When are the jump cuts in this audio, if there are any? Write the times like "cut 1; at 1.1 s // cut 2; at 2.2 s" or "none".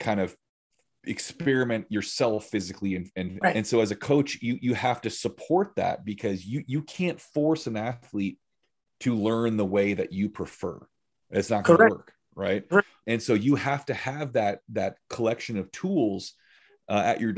cut 1; at 3.4 s // cut 2; at 13.0 s